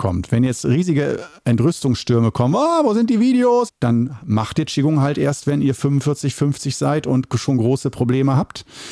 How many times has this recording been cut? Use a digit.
1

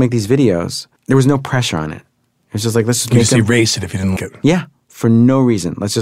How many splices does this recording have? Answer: 2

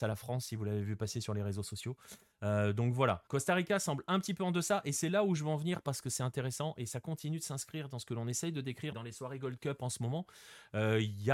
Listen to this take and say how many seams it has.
2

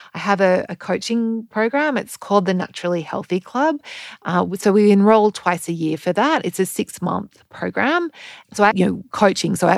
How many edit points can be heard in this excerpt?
1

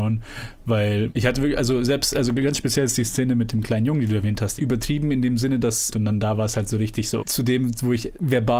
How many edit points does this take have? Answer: 3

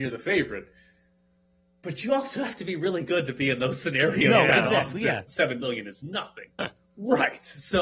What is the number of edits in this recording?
2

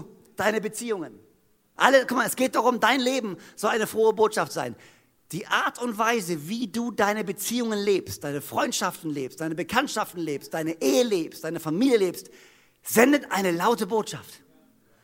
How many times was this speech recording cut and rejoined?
1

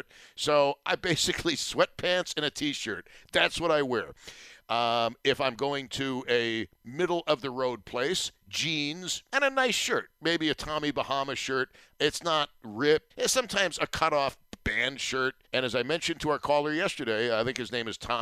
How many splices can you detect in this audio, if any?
2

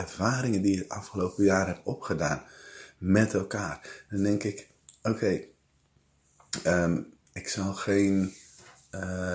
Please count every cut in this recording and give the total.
0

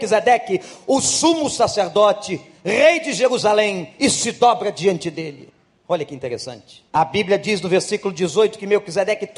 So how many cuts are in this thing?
3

